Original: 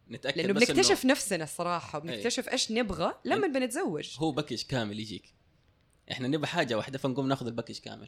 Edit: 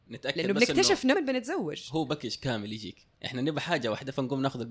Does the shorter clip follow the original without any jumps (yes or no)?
no